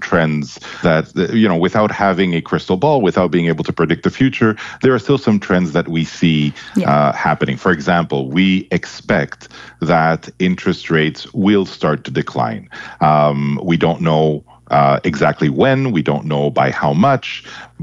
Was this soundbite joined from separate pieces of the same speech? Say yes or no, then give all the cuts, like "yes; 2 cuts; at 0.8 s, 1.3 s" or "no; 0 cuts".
no; 0 cuts